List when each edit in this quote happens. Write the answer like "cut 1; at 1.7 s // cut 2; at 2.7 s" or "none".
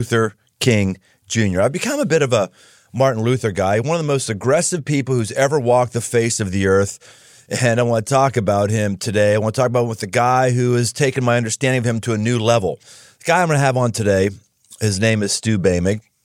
none